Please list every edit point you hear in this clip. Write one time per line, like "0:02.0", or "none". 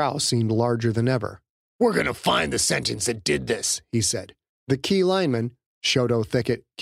0:01.6
0:04.5